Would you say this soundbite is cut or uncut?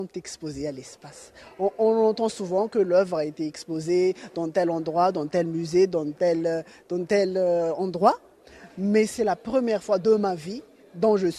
uncut